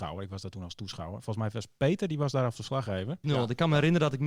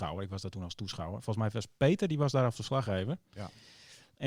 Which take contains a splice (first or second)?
first